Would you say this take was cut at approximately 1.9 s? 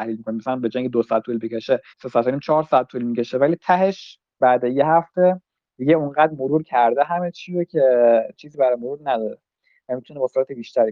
yes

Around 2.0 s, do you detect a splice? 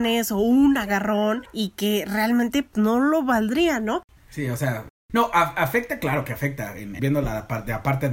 no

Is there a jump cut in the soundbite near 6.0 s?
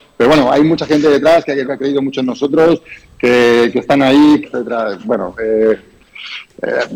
no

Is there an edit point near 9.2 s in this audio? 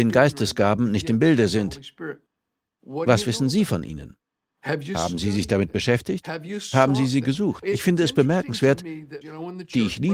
yes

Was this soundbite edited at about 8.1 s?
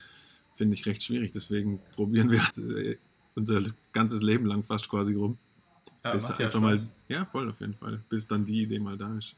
no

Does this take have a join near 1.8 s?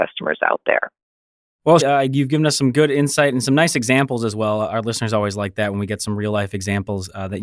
yes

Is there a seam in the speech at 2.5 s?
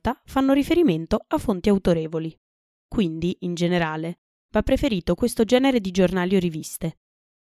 no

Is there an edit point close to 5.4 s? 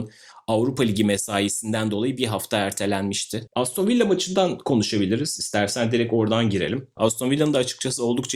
no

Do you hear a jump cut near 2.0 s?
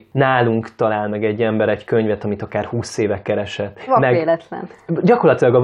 no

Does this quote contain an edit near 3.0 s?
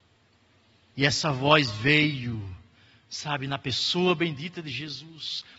no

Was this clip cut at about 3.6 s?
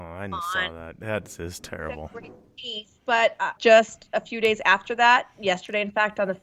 yes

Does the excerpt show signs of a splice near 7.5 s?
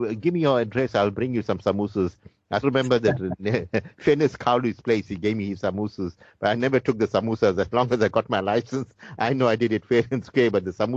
no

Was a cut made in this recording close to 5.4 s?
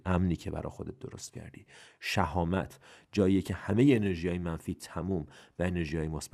no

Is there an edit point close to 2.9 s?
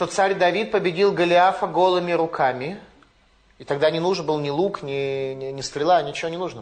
no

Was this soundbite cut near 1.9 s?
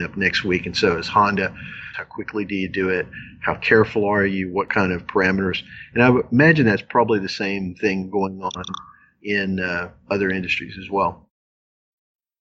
yes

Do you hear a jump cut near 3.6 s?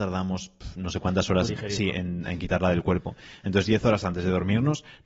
no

